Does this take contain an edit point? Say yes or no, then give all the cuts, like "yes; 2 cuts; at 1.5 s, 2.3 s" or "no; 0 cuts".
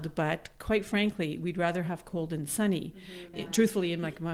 yes; 1 cut; at 3.3 s